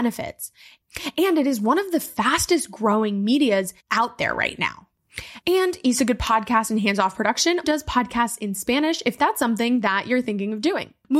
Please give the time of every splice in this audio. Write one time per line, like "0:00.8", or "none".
0:03.8
0:05.4
0:07.6